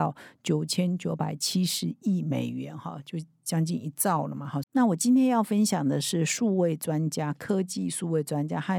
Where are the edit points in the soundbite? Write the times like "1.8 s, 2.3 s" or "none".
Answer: 4.6 s